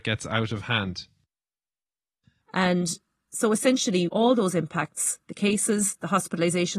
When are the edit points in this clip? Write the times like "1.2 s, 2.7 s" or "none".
2.4 s, 4.1 s